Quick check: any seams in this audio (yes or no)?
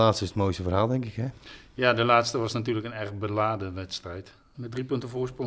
yes